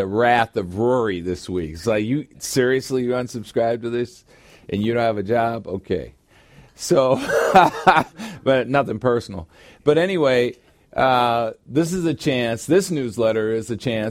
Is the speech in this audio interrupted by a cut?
no; 0 cuts

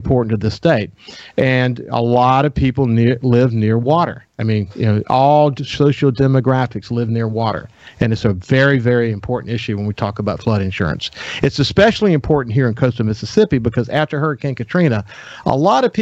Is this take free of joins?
yes; 0 cuts

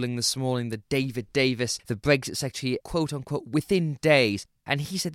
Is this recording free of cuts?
no; 1 cut; at 2.8 s

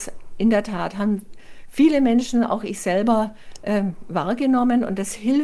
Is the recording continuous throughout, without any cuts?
yes; 0 cuts

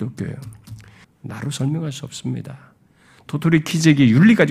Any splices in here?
yes; 1 cut; at 1.0 s

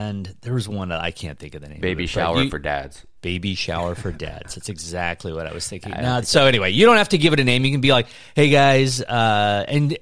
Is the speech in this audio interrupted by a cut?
yes; 1 cut; at 3.2 s

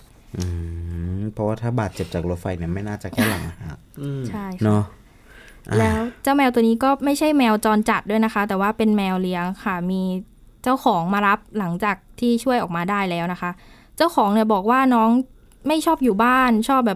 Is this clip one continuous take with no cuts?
yes; 0 cuts

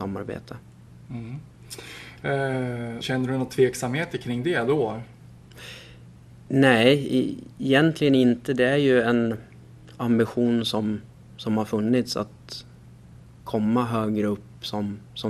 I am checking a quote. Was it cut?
yes; 1 cut; at 3.0 s

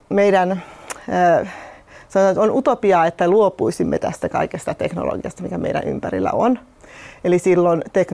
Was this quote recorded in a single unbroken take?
yes; 0 cuts

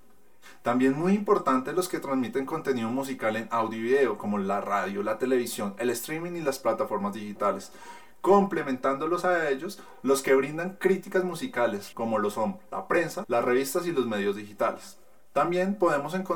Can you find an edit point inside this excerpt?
yes; 2 cuts; at 11.9 s, 13.2 s

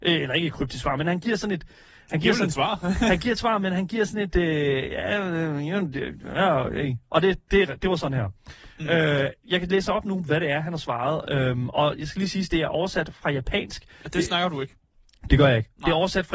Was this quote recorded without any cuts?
no; 1 cut; at 14.0 s

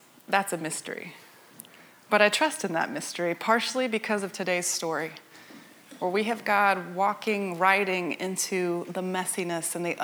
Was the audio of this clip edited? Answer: no; 0 cuts

